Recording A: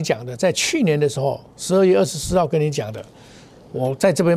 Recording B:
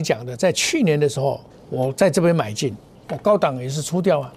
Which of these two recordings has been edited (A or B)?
B